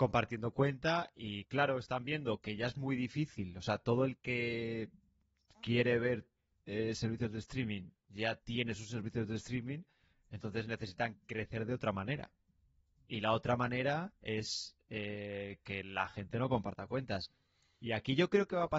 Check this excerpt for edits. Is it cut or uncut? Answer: uncut